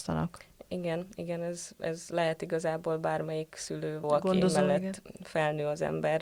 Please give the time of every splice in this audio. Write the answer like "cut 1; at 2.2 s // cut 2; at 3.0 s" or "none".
cut 1; at 4.0 s